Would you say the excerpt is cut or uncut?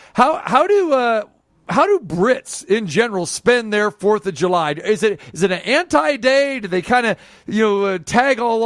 uncut